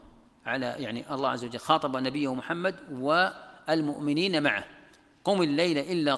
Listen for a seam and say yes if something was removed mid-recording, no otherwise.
no